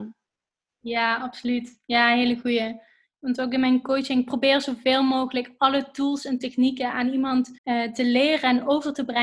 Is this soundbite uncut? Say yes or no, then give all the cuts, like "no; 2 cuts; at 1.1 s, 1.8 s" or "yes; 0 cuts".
no; 2 cuts; at 3.1 s, 7.6 s